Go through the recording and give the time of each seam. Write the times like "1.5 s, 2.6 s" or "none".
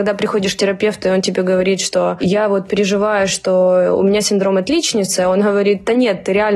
none